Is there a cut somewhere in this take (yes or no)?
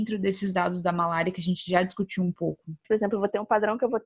yes